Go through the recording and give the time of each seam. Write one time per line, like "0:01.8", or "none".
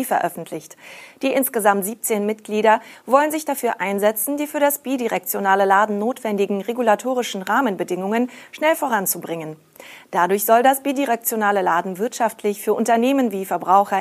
none

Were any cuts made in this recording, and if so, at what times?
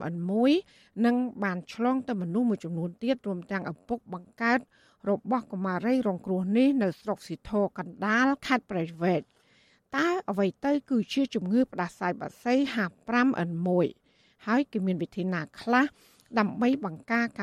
none

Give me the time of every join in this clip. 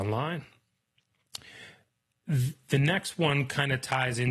none

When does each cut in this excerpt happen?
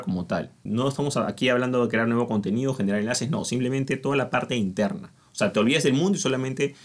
none

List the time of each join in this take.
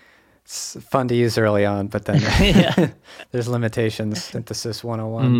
0:04.3

